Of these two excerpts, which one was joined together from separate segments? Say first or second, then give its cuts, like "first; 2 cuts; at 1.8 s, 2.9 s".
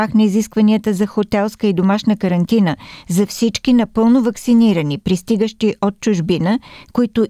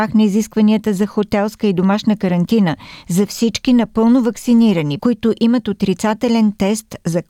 second; 1 cut; at 5.0 s